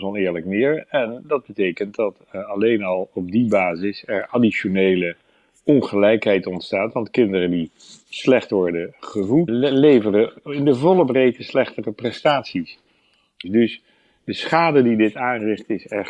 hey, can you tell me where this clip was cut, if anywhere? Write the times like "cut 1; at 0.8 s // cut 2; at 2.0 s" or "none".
cut 1; at 9.5 s // cut 2; at 13.4 s